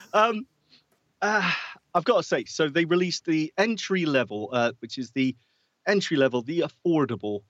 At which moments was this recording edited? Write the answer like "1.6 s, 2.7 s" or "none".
2.5 s, 4.8 s

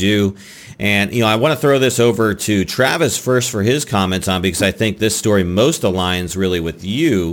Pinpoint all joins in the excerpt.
none

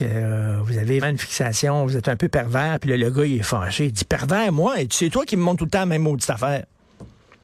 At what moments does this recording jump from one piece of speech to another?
1.0 s

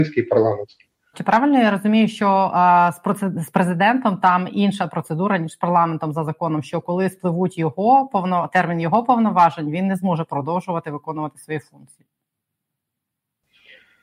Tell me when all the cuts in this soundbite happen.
1.1 s

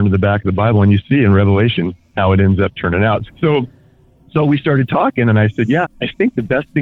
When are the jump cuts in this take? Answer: 3.3 s, 5.8 s

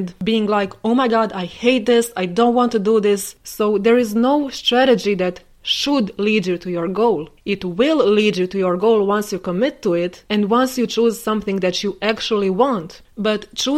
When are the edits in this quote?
3.4 s, 7.4 s

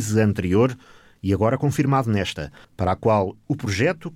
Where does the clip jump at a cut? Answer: 2.6 s

